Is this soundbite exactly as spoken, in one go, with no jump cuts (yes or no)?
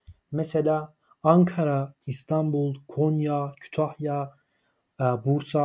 yes